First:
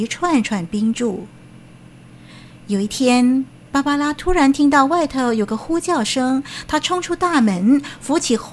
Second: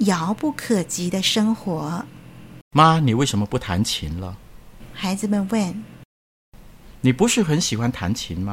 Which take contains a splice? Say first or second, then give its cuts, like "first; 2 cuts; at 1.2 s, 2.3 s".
second; 1 cut; at 2.6 s